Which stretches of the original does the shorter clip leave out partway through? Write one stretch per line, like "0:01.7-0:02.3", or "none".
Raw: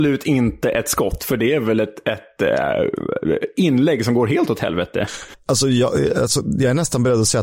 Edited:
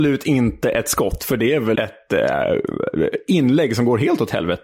0:01.7-0:02.0